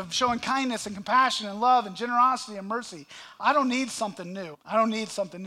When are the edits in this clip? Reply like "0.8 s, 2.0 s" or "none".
4.5 s